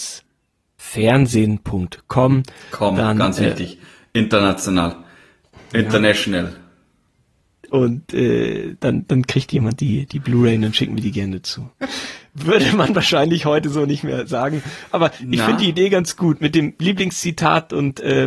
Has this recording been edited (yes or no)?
yes